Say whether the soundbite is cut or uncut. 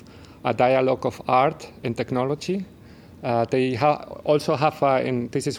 uncut